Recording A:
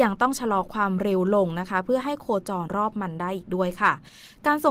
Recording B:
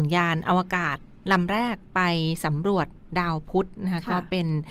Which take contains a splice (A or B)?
A